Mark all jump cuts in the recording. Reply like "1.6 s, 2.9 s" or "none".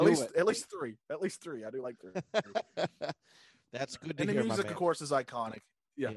none